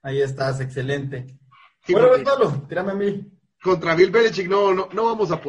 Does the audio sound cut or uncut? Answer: uncut